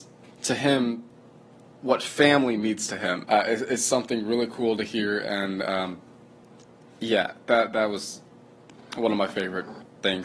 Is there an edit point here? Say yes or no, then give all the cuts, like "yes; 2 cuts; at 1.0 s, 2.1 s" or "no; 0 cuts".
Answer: yes; 1 cut; at 3.2 s